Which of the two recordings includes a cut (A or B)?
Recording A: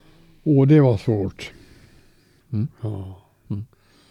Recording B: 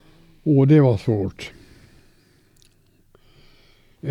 A